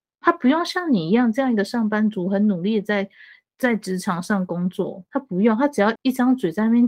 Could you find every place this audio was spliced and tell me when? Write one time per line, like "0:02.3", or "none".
0:06.0